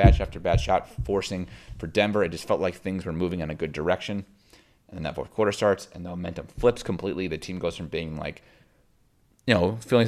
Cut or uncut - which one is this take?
uncut